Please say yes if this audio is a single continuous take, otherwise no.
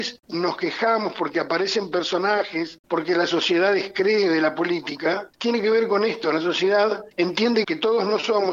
yes